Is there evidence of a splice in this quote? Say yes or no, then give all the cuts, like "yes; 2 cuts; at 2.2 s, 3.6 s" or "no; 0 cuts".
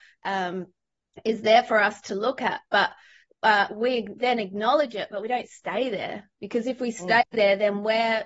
no; 0 cuts